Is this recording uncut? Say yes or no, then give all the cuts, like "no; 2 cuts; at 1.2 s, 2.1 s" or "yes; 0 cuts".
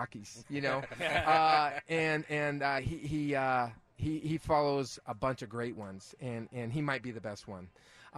yes; 0 cuts